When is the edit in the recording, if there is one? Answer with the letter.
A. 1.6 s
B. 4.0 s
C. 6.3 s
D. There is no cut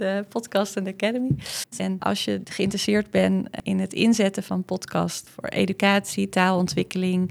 A